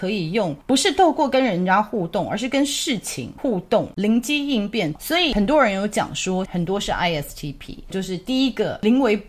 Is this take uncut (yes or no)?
no